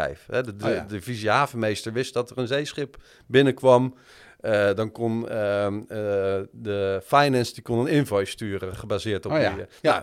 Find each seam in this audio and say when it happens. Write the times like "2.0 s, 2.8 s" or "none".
none